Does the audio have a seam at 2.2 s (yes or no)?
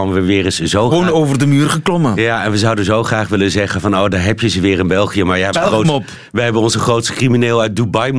no